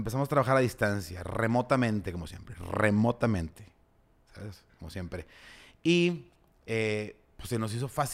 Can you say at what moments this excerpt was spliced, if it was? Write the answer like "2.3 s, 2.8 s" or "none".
none

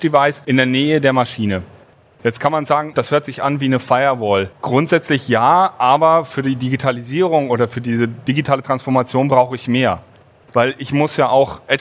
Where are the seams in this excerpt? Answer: 2.9 s, 4.5 s

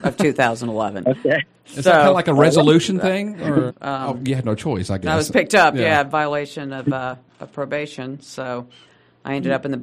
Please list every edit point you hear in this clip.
3.7 s

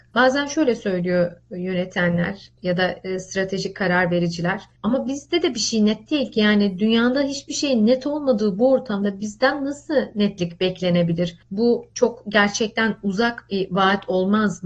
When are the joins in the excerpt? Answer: none

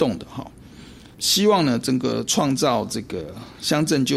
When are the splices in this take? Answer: 1.1 s

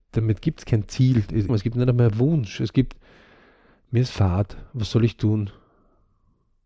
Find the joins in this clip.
1.5 s

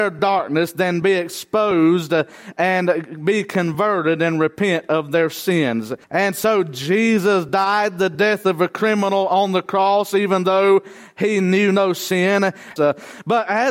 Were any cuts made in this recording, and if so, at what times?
6.0 s, 12.8 s

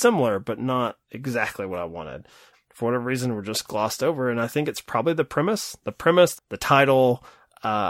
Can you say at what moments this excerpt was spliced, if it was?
2.5 s, 6.4 s

